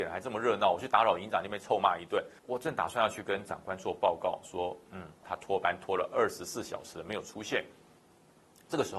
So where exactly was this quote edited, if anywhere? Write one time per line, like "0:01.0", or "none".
0:02.4
0:05.2